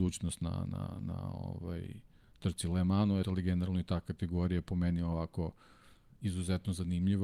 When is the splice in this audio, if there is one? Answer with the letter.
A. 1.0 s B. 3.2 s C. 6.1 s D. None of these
B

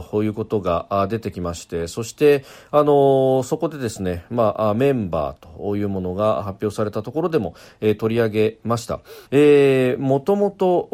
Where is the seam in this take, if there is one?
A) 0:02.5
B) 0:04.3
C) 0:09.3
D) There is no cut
C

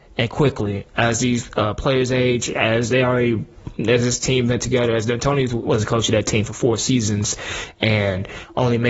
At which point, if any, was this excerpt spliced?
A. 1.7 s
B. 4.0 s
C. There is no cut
C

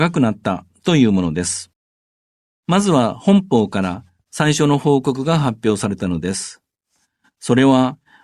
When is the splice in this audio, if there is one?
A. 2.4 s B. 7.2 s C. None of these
A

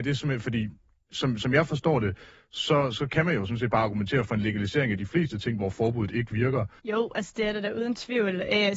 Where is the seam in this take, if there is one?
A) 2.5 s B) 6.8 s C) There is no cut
B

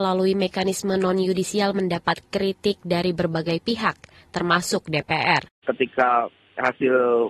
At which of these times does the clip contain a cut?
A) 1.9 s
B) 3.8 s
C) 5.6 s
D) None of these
C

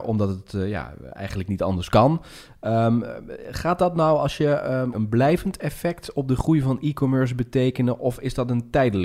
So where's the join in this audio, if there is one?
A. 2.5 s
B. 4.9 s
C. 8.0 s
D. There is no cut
B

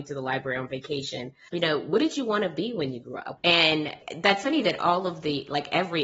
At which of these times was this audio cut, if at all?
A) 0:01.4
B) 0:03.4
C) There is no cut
B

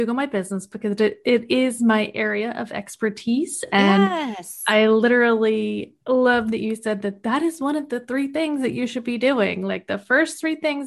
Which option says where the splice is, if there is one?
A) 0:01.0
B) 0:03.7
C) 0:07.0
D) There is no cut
D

